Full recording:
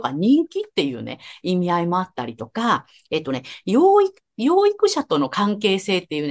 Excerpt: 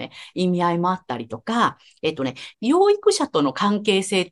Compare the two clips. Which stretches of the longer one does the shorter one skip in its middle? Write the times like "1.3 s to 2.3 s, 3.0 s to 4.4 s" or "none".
3.6 s to 4.3 s